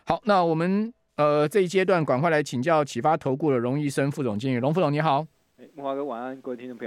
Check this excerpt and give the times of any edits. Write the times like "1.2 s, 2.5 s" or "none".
none